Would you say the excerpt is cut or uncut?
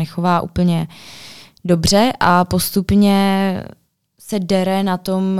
uncut